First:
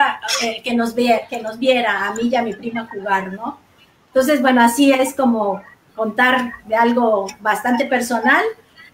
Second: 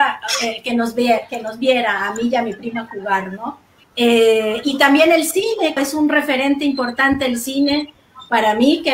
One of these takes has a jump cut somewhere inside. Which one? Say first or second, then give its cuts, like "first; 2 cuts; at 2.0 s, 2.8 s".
second; 2 cuts; at 3.8 s, 5.8 s